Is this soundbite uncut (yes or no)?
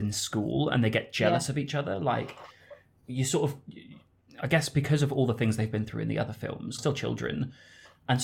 no